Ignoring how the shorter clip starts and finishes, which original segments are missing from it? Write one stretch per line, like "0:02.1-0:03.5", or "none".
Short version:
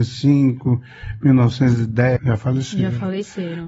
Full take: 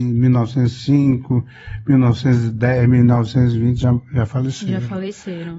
0:02.8-0:04.1